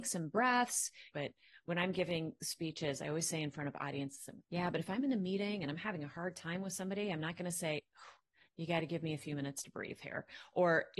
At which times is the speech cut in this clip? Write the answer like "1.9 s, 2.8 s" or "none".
1.1 s, 4.4 s